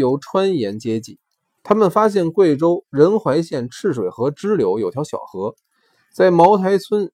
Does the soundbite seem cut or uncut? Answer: cut